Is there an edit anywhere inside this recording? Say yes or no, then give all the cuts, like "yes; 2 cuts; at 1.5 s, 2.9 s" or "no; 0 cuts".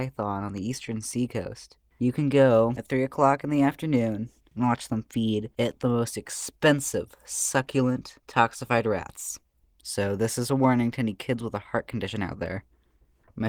yes; 1 cut; at 9.6 s